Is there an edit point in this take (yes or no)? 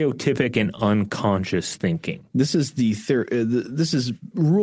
no